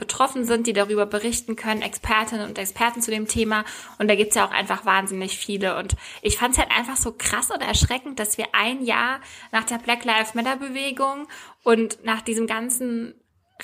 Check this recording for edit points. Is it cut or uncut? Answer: uncut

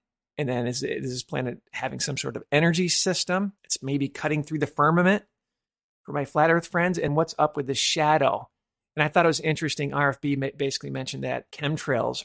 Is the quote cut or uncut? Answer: cut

